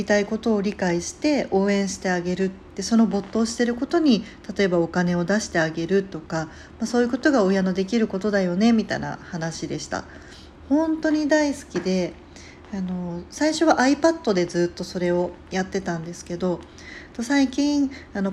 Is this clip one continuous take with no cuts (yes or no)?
no